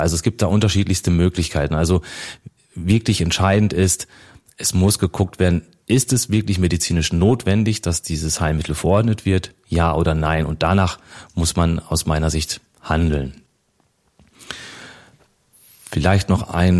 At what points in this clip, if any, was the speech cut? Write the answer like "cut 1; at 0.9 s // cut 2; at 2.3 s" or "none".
none